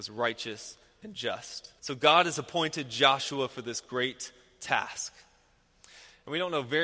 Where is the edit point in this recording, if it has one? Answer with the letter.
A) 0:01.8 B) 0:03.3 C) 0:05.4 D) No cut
A